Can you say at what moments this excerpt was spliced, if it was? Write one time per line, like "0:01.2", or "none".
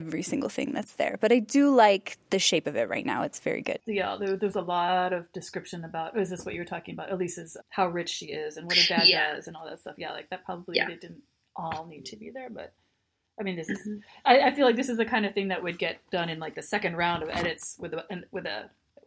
0:07.6